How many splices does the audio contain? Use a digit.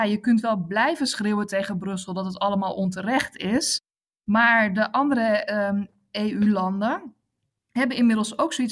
0